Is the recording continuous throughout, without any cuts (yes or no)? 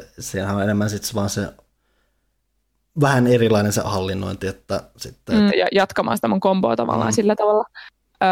no